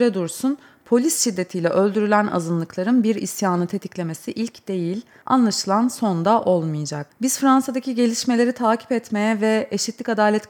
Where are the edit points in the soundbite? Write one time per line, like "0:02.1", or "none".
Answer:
none

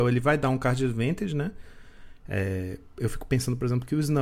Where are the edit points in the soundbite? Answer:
0:02.2

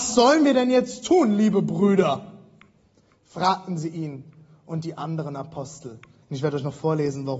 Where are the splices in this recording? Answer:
0:06.2

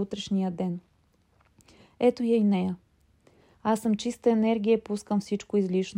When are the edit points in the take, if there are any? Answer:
0:03.5

